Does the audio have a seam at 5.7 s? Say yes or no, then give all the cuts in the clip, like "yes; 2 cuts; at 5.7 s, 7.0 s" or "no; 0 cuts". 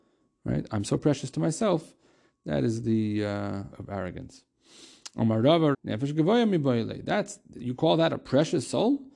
yes; 2 cuts; at 3.7 s, 5.7 s